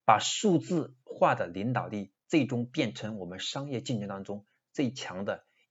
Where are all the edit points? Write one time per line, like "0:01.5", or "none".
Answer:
none